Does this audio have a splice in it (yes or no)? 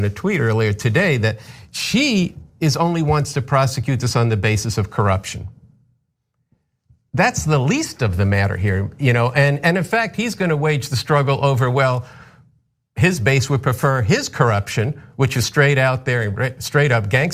no